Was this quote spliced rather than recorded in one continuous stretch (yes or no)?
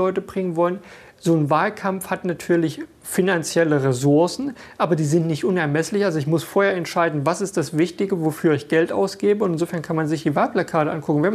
no